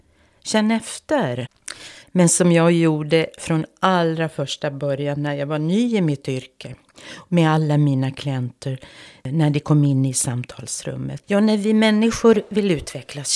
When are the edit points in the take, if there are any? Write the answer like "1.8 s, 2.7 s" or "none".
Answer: 2.0 s, 11.2 s

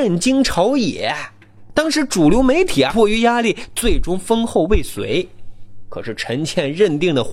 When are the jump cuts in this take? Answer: 2.9 s

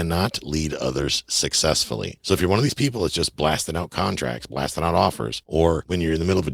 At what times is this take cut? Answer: 5.4 s

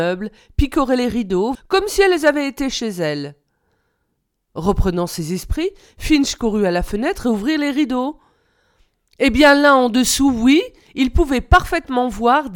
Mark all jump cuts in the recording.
1.5 s

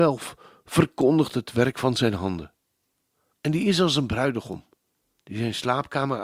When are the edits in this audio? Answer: 3.3 s

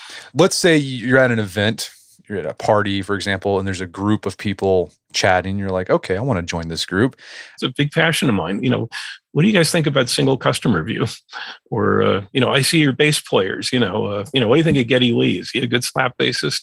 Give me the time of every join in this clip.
7.6 s

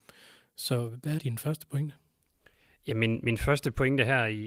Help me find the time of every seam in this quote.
1.2 s

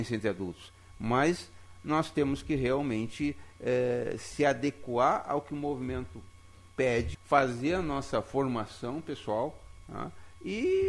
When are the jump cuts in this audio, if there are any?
7.1 s

